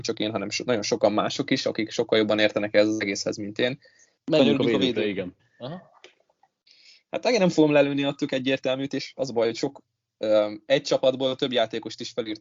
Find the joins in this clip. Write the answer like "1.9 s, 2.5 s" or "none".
4.2 s